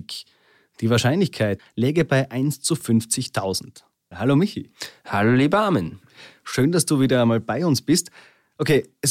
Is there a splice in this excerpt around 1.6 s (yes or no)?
yes